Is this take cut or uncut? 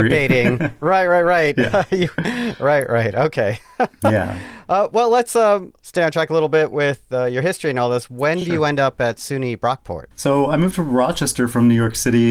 uncut